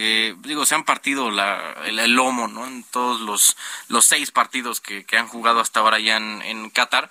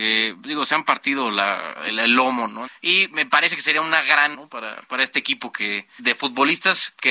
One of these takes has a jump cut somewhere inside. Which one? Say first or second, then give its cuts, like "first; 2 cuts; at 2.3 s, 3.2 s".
second; 3 cuts; at 2.7 s, 4.3 s, 6.0 s